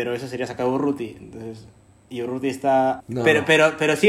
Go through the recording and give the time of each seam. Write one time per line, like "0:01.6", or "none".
0:03.0